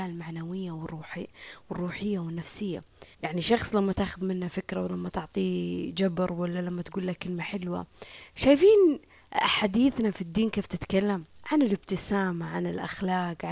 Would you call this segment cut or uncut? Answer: cut